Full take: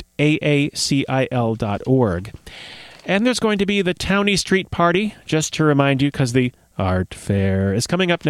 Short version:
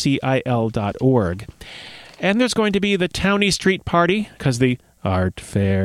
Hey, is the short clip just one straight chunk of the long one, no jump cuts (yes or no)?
no